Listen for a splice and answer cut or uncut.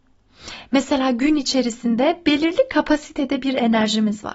uncut